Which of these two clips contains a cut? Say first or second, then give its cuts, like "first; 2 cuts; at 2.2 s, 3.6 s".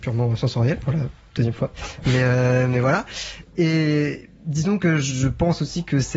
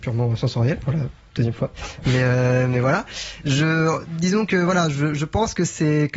first; 1 cut; at 3.4 s